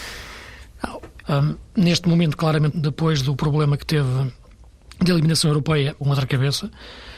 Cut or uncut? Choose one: cut